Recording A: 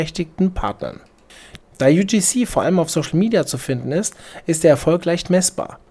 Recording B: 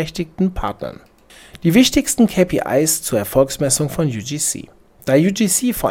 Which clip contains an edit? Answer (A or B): A